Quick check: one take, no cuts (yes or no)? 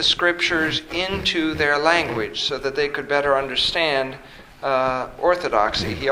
yes